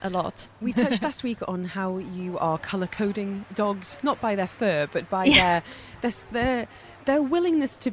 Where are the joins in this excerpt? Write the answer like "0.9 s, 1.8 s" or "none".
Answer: none